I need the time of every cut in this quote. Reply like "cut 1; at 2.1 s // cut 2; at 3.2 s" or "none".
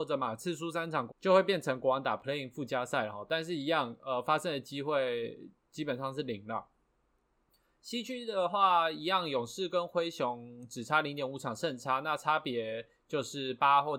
cut 1; at 1.1 s